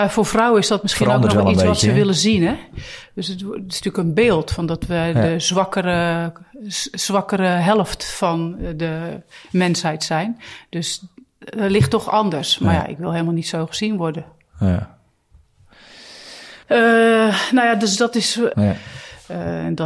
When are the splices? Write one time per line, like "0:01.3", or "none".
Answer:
0:16.6
0:18.5